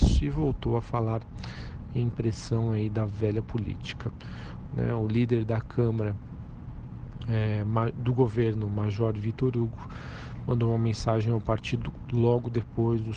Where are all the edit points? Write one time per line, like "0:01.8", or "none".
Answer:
0:04.7